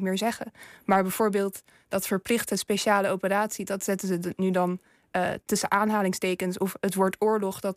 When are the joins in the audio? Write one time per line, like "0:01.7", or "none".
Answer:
none